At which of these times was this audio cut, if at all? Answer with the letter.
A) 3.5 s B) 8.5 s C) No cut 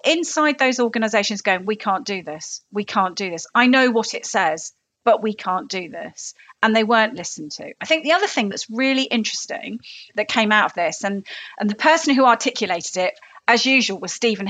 B